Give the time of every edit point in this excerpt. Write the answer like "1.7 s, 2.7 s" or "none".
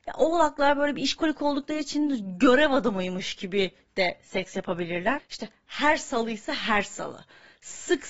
5.2 s